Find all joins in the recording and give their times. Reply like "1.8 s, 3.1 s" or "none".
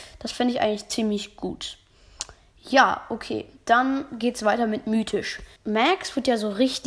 5.6 s